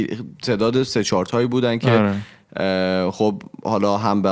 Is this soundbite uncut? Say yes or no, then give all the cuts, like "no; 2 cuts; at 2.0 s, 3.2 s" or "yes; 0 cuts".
yes; 0 cuts